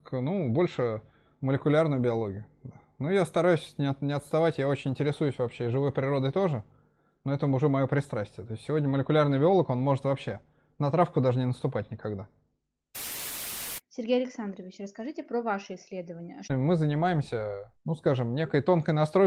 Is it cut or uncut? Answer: cut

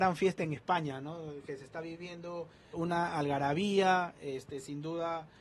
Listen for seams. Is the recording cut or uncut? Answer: cut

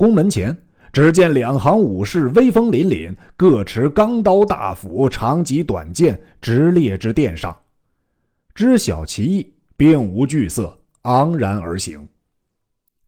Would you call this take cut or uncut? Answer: uncut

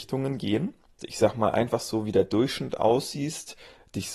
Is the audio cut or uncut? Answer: cut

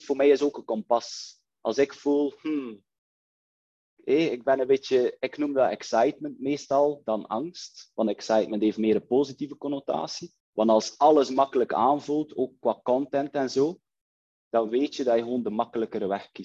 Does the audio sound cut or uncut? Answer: cut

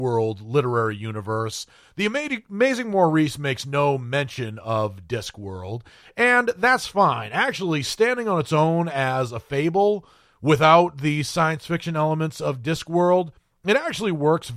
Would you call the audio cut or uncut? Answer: uncut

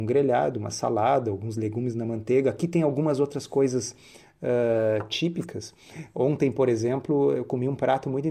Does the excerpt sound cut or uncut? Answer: uncut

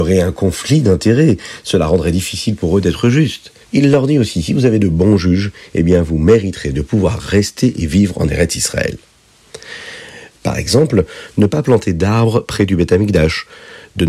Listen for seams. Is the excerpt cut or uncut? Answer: cut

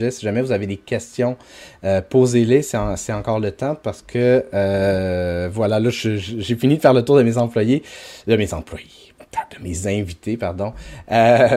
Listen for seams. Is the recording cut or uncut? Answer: uncut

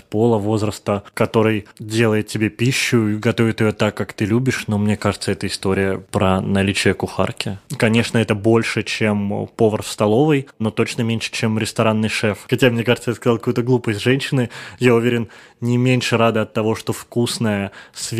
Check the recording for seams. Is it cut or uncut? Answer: cut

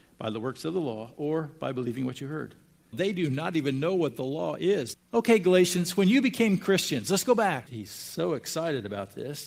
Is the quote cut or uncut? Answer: cut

